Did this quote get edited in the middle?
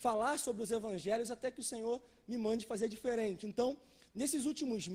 no; 0 cuts

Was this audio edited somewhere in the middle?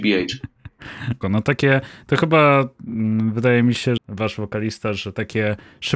yes; 2 cuts; at 1.2 s, 4.0 s

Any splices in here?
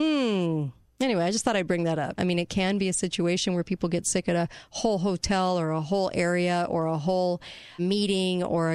yes; 2 cuts; at 2.2 s, 7.8 s

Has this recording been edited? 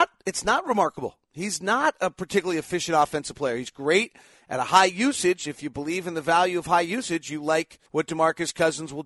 yes; 1 cut; at 7.9 s

